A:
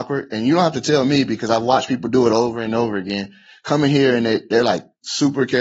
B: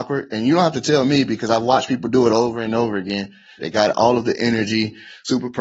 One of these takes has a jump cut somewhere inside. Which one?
B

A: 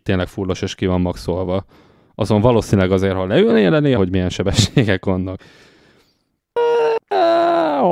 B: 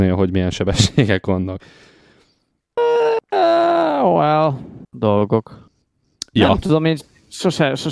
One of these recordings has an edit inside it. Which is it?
A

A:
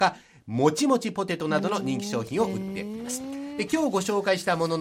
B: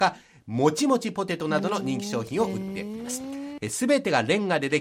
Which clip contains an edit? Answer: B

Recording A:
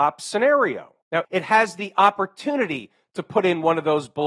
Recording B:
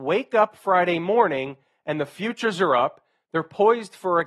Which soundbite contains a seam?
A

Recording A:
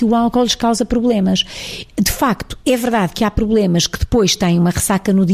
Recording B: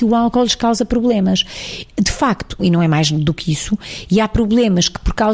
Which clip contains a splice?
B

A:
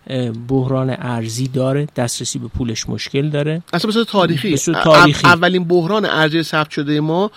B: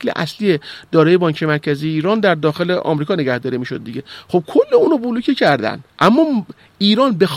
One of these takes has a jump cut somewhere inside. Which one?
B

